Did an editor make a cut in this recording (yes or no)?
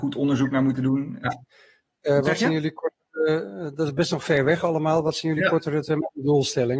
yes